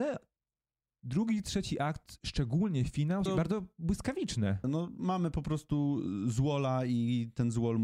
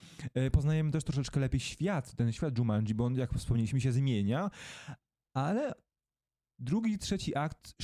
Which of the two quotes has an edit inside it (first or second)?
first